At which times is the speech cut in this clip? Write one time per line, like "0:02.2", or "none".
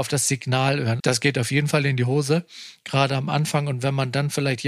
0:01.0

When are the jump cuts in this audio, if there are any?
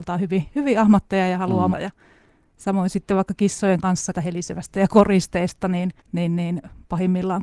0:01.7
0:04.1
0:06.0

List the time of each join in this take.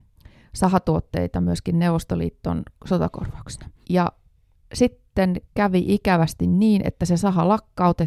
0:03.8
0:05.5

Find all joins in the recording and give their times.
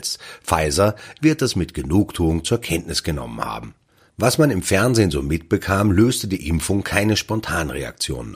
0:01.2
0:04.1

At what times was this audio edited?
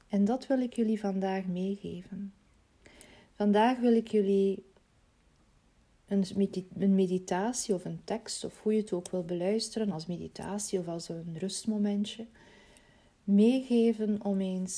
none

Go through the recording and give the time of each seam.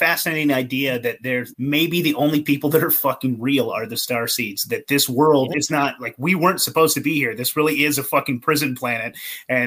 0:01.5
0:05.5

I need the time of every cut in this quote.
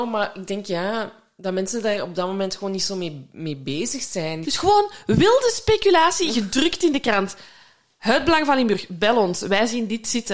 0:04.4

